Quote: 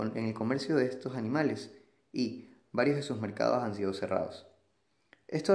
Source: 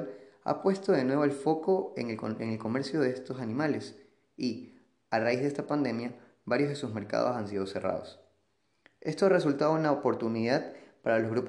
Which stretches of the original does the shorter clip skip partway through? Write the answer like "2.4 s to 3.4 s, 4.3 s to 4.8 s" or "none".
4.9 s to 6.3 s